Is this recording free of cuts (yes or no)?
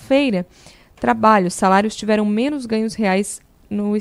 yes